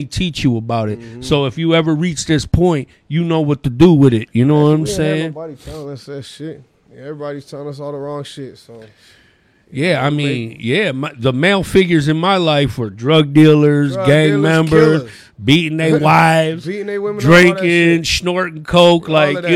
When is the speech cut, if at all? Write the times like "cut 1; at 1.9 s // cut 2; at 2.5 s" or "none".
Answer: none